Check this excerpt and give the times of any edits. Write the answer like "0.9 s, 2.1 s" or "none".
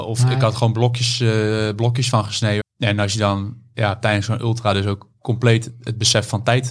2.6 s

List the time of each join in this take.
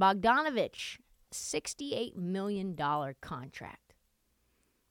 1.3 s

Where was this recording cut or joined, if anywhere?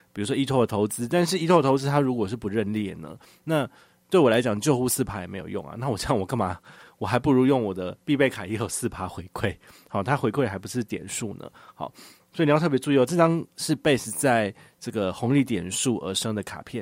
none

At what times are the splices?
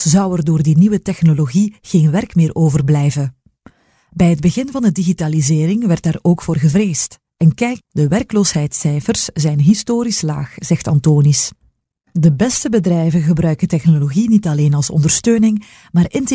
none

